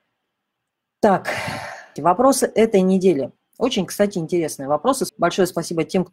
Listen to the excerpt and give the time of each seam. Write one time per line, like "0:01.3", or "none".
0:02.0
0:05.1

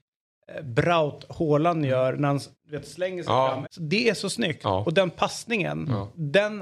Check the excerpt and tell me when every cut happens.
0:03.6

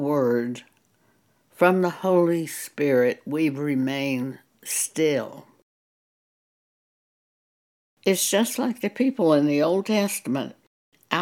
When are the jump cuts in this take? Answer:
none

